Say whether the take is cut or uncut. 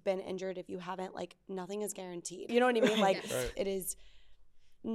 cut